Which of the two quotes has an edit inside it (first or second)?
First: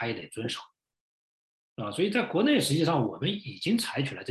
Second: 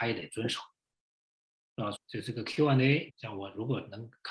second